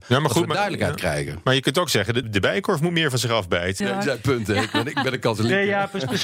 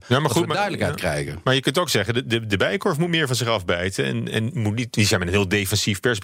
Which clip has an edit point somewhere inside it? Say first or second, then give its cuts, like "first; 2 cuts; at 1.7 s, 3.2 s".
first; 2 cuts; at 2.2 s, 3.8 s